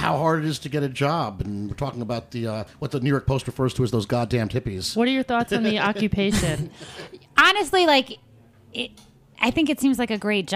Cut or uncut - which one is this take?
uncut